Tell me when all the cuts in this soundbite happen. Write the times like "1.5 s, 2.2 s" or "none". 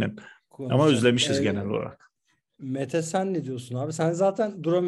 none